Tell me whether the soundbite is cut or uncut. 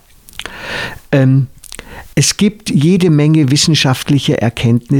cut